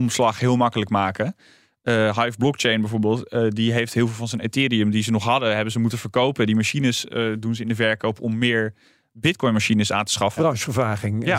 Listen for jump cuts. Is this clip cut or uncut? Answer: cut